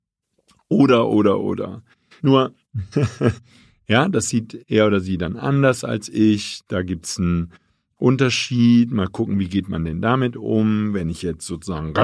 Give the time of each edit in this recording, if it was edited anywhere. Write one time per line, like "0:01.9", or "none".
0:02.2